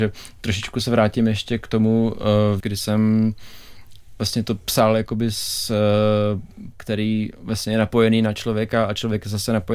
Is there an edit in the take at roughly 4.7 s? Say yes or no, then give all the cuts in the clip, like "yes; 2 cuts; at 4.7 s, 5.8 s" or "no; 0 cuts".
no; 2 cuts; at 2.6 s, 6.7 s